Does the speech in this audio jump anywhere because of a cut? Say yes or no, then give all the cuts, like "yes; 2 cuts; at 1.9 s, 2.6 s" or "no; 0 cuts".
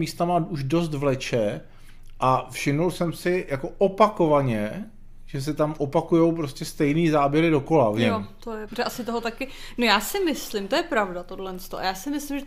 yes; 1 cut; at 8.7 s